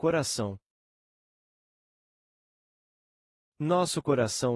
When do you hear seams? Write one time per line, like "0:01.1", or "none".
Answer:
none